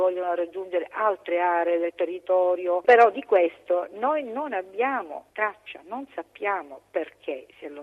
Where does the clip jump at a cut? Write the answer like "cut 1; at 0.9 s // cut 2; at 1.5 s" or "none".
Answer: cut 1; at 2.8 s